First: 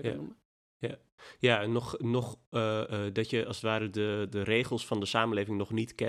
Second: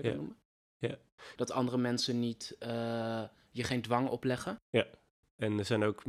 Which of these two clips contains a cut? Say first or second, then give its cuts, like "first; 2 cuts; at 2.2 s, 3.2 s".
second; 1 cut; at 1.3 s